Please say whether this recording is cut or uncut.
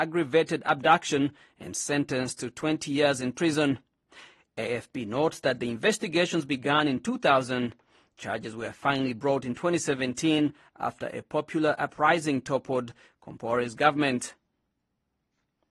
uncut